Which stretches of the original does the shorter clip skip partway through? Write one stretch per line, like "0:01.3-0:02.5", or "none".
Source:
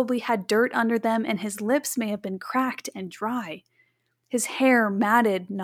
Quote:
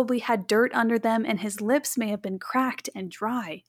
none